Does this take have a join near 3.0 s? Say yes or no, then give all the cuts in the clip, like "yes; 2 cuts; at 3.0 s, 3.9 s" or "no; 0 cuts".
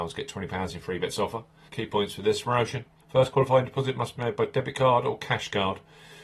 yes; 2 cuts; at 1.7 s, 3.0 s